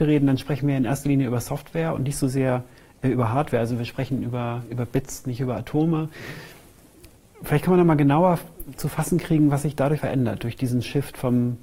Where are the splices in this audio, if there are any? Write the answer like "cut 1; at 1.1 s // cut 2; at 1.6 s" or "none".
cut 1; at 10.0 s